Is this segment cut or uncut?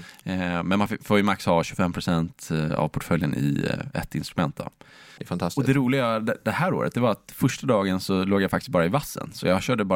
cut